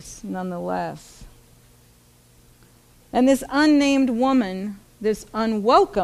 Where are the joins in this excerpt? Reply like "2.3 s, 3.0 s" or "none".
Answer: none